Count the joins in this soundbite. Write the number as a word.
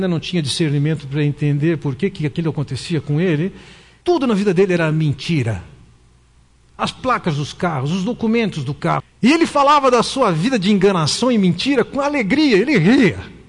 two